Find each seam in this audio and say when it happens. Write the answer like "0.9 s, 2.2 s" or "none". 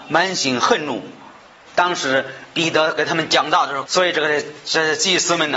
1.7 s, 3.9 s